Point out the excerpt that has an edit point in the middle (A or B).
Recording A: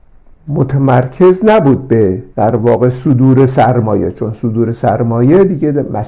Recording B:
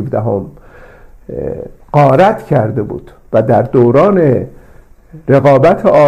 A